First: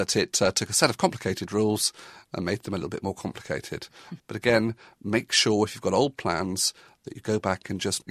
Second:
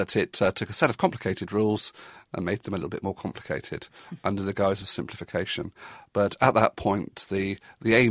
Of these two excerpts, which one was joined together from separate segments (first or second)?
first